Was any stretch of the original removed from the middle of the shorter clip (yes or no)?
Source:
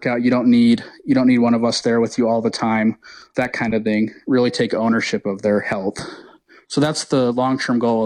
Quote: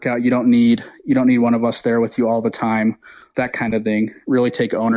no